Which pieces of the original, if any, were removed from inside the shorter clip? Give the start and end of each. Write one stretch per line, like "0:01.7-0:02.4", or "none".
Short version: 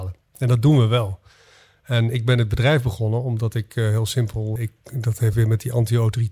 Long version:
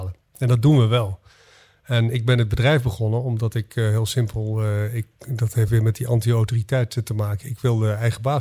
0:04.6-0:04.9